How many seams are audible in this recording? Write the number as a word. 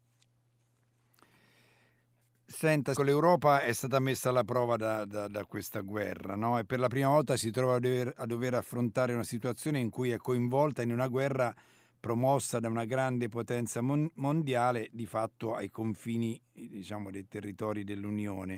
one